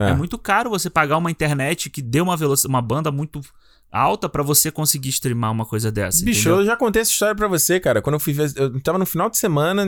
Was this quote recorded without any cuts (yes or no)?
yes